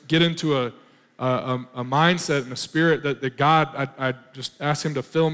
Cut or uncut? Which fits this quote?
cut